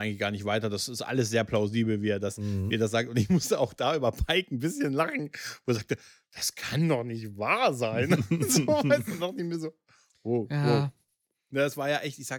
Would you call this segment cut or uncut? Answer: uncut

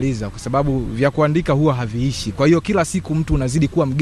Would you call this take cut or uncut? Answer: uncut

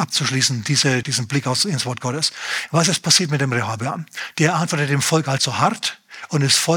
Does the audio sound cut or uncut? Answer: cut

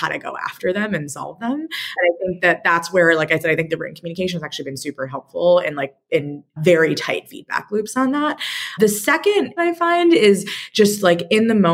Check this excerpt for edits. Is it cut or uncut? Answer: cut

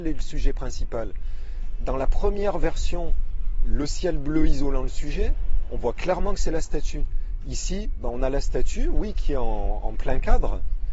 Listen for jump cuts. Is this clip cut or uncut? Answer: uncut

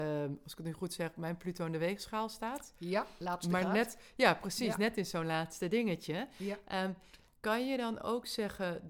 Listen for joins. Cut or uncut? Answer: uncut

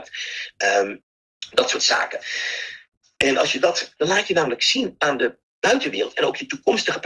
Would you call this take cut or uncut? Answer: cut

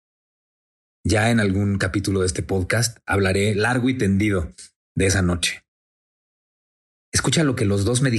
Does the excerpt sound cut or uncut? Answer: uncut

